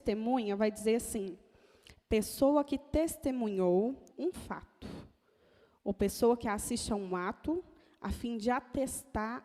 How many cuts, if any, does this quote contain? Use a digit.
1